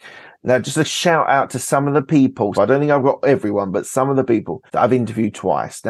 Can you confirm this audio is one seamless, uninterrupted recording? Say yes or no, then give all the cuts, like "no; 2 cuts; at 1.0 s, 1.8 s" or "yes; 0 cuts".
no; 2 cuts; at 2.5 s, 4.7 s